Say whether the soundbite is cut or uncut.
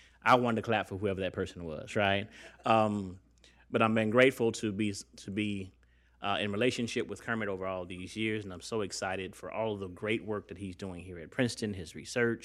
uncut